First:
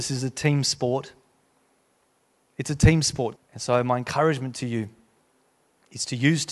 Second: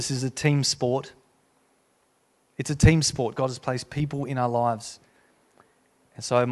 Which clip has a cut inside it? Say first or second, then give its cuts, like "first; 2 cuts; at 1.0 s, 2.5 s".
first; 1 cut; at 3.4 s